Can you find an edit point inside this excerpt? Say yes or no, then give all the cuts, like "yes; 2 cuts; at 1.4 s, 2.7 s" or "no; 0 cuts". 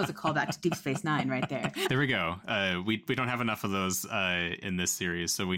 yes; 2 cuts; at 1.8 s, 4.6 s